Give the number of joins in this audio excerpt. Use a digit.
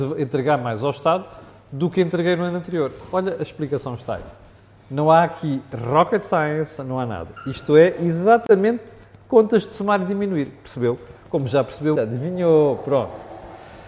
1